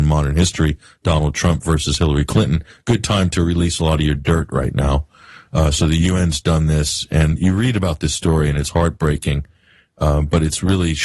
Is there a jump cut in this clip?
no; 0 cuts

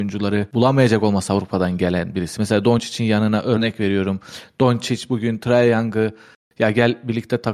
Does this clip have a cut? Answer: no; 0 cuts

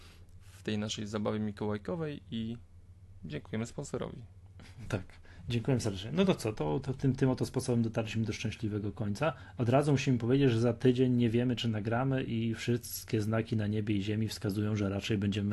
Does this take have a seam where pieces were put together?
yes; 1 cut; at 6.5 s

